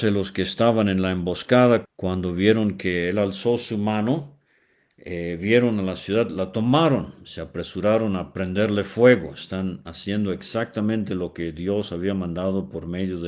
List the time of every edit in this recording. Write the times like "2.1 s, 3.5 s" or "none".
1.8 s

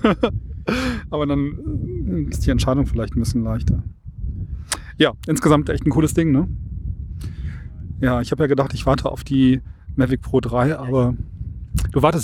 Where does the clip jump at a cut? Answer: 2.3 s

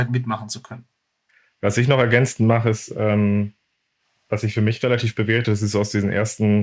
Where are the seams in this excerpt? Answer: none

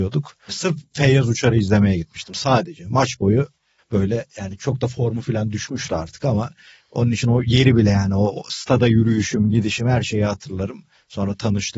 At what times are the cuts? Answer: none

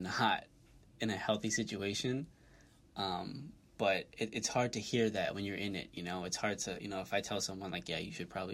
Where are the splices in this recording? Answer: none

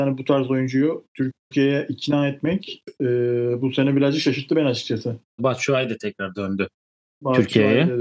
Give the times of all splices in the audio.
5.4 s

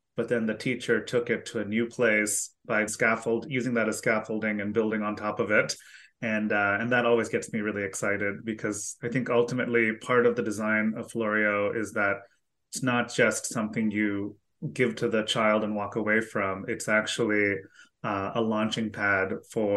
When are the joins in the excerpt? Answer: 2.9 s

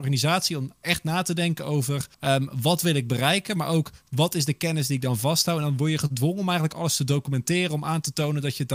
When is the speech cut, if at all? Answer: 2.1 s

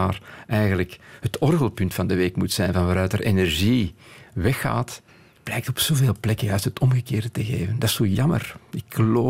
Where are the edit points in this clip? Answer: none

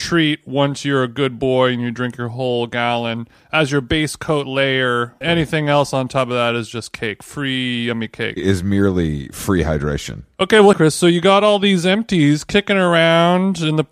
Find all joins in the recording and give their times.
5.2 s, 10.7 s

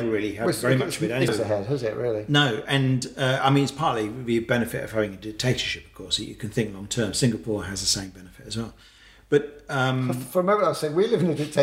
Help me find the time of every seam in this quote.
1.3 s

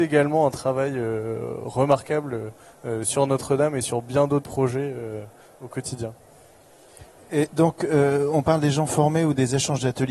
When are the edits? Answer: none

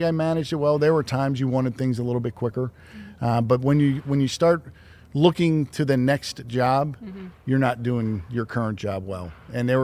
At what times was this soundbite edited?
none

